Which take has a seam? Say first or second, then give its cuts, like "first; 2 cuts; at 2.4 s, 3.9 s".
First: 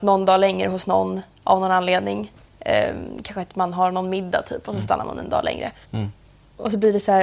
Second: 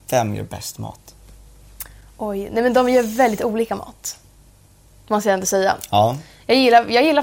first; 1 cut; at 5.8 s